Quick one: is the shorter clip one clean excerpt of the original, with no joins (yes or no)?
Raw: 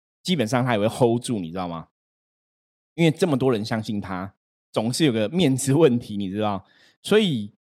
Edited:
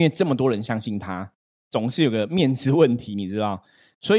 yes